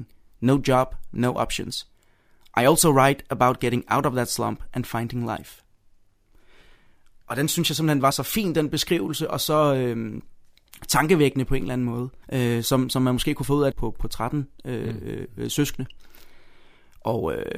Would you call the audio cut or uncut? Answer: cut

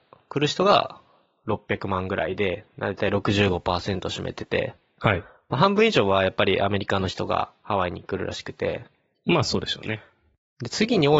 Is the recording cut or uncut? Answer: uncut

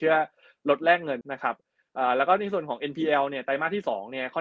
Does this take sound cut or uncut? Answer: cut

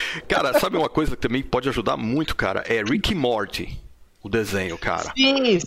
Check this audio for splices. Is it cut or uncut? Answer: uncut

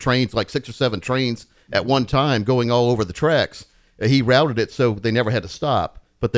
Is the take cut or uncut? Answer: uncut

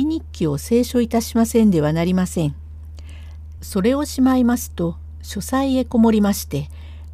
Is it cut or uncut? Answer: cut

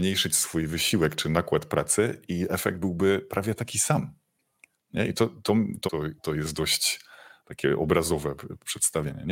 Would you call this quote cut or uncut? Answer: cut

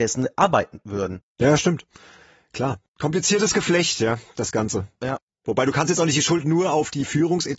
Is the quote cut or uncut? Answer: uncut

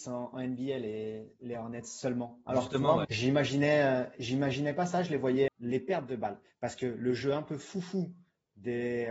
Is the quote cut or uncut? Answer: cut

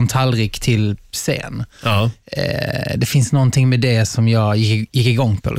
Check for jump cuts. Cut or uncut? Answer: uncut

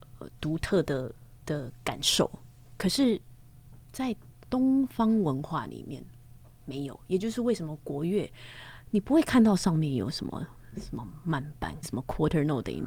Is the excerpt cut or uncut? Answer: cut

